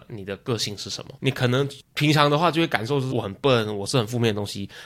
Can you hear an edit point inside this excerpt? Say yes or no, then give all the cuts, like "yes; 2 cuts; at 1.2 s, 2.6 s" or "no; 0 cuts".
yes; 2 cuts; at 1.2 s, 3.1 s